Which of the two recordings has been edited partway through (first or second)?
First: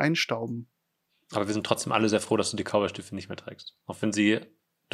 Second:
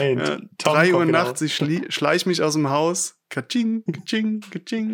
second